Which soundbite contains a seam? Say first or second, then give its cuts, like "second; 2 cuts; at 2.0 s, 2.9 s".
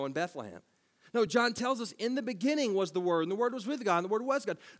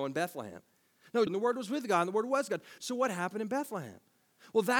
second; 2 cuts; at 1.3 s, 2.8 s